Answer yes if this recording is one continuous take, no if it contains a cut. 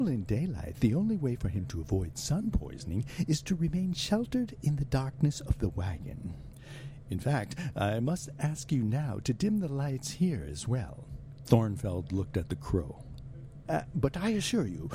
no